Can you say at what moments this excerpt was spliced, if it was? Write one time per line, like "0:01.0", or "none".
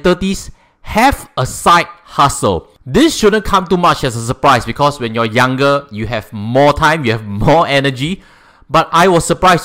none